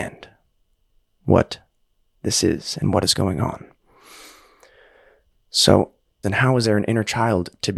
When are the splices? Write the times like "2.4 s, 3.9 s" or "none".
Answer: 6.2 s